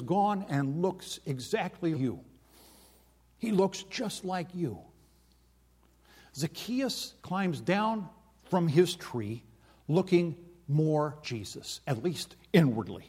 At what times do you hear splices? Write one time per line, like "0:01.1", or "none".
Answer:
0:01.9
0:07.2
0:11.2